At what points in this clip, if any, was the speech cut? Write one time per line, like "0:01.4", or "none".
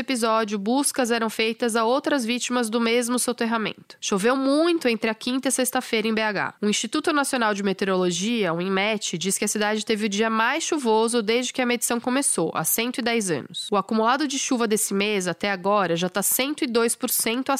none